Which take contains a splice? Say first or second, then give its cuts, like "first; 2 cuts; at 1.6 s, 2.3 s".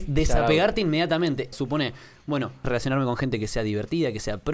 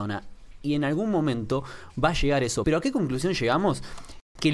first; 2 cuts; at 1.5 s, 2.6 s